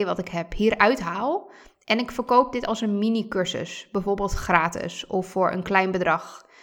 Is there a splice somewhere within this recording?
no; 0 cuts

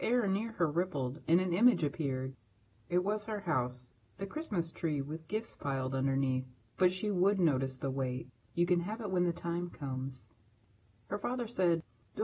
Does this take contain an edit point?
yes; 2 cuts; at 6.7 s, 8.5 s

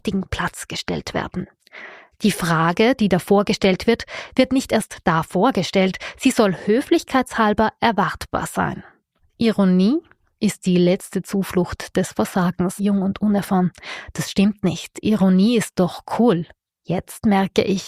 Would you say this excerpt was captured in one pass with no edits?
no; 2 cuts; at 9.2 s, 12.8 s

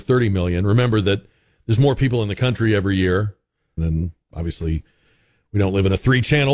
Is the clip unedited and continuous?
no; 1 cut; at 3.8 s

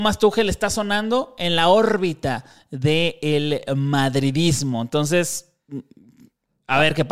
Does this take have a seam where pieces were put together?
no; 0 cuts

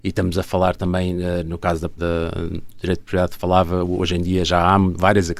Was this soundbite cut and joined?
yes; 1 cut; at 2.0 s

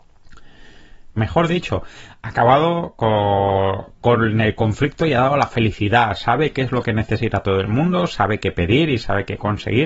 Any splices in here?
yes; 1 cut; at 1.2 s

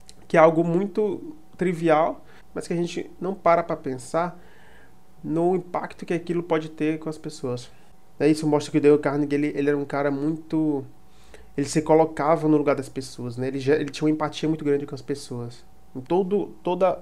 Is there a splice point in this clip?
yes; 1 cut; at 16.1 s

